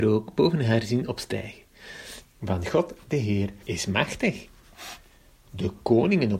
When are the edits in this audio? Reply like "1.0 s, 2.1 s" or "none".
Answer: 2.2 s, 3.6 s